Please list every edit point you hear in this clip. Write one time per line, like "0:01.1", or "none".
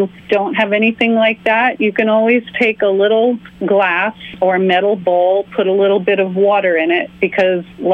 none

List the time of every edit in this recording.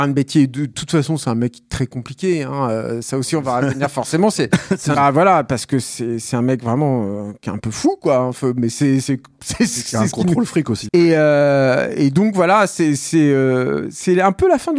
0:04.9
0:10.9

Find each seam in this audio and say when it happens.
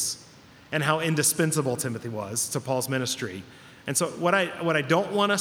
none

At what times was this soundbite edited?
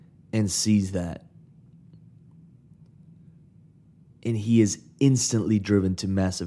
none

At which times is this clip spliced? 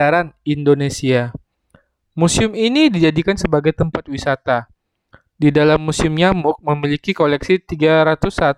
none

